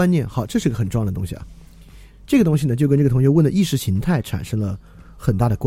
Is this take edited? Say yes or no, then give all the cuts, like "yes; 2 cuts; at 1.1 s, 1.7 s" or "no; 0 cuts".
no; 0 cuts